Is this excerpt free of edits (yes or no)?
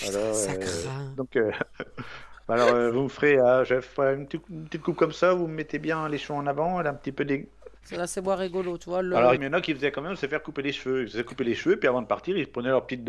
no